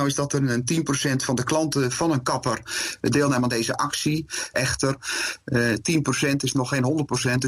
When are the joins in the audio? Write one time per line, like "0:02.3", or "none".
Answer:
0:04.5